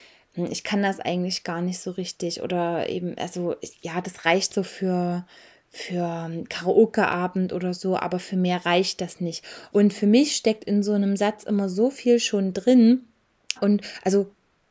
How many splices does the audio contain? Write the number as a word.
two